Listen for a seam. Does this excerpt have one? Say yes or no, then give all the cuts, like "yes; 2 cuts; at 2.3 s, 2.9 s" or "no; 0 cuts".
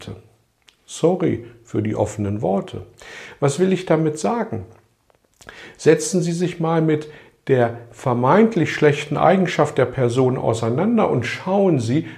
no; 0 cuts